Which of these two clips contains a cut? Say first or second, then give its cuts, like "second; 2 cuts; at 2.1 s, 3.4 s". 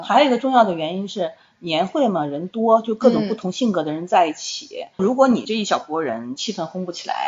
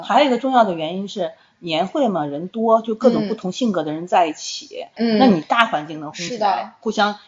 second; 1 cut; at 5.0 s